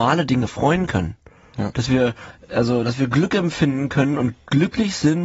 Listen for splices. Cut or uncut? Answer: cut